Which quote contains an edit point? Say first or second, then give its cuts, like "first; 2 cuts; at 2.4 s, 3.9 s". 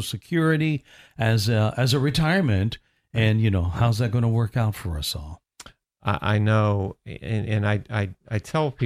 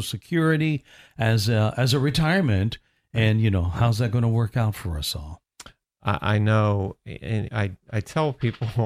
second; 1 cut; at 7.5 s